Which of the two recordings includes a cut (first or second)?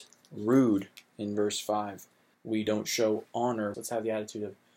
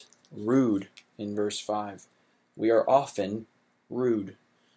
first